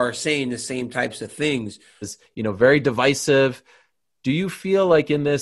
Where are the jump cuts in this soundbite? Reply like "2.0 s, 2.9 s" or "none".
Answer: 2.0 s